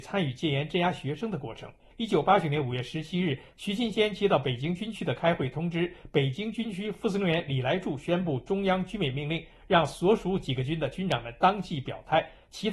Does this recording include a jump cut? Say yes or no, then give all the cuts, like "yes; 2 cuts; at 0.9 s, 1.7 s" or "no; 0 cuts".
yes; 1 cut; at 1.9 s